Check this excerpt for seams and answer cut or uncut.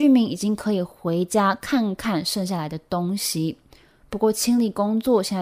uncut